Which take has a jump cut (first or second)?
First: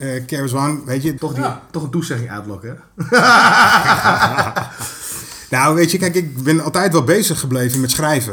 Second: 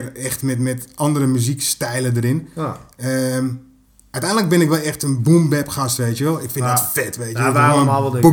first